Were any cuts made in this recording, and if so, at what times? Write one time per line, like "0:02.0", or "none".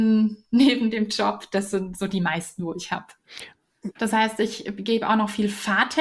0:04.0